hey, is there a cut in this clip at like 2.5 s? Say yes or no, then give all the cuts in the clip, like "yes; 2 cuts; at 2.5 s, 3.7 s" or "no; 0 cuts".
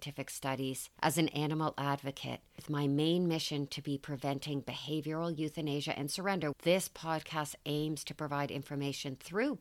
no; 2 cuts; at 1.0 s, 6.5 s